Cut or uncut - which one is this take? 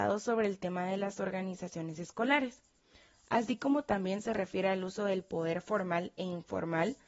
uncut